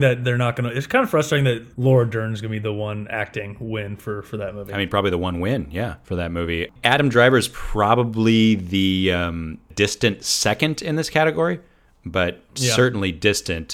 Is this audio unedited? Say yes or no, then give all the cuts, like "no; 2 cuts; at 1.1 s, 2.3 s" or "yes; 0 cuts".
no; 1 cut; at 1.7 s